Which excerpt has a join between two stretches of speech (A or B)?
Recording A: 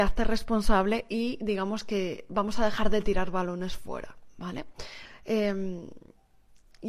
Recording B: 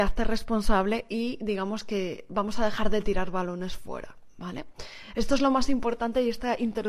A